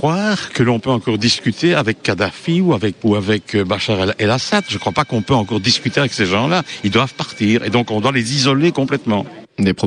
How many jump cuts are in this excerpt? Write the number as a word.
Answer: one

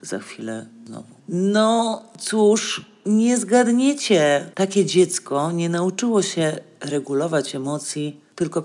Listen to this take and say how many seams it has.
one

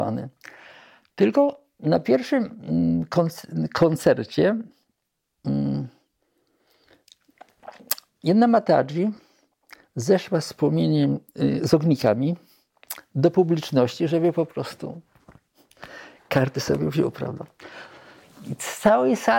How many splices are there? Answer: zero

